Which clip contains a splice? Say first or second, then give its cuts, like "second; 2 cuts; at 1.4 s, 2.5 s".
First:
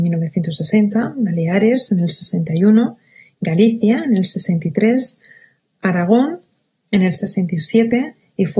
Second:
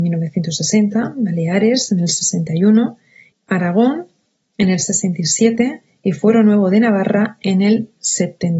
second; 1 cut; at 3.3 s